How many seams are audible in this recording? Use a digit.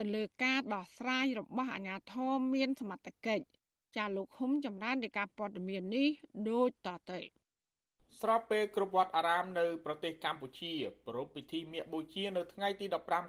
0